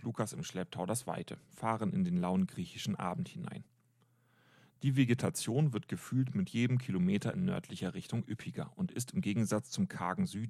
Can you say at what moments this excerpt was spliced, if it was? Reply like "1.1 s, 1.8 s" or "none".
none